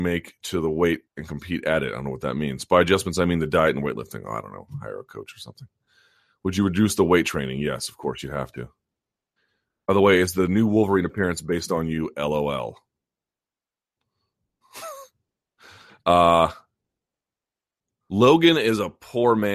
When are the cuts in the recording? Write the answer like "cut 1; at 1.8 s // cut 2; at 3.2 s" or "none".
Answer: cut 1; at 1.1 s